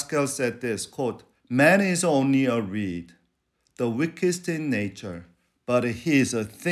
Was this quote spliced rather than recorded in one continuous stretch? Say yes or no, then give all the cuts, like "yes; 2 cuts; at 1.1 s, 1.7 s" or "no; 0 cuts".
no; 0 cuts